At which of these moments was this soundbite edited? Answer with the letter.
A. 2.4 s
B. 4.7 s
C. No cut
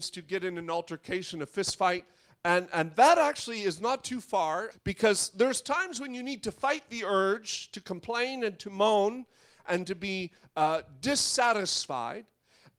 B